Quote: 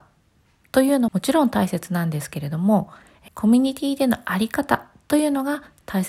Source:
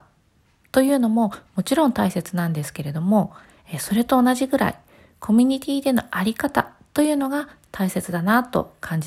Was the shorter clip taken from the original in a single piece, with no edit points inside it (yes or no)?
no